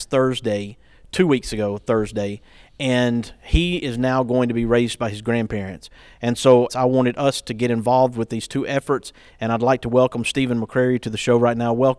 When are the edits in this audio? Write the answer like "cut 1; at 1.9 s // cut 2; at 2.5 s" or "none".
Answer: cut 1; at 6.7 s